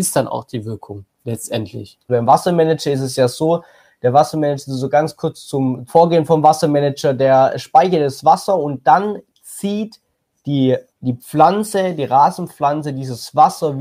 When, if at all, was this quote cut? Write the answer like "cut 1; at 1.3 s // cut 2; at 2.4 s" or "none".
cut 1; at 2.1 s // cut 2; at 5.9 s // cut 3; at 10.9 s